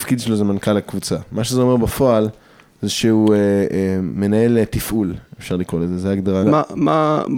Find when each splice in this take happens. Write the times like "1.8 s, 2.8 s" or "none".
6.4 s